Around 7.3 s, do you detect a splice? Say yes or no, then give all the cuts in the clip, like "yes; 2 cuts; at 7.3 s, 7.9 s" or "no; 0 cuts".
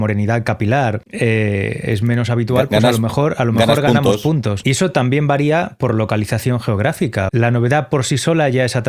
yes; 2 cuts; at 4.6 s, 7.3 s